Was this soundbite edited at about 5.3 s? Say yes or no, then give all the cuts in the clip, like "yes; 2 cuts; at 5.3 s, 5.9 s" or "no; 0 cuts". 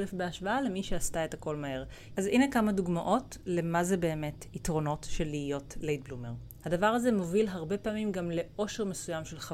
no; 2 cuts; at 2.1 s, 6.6 s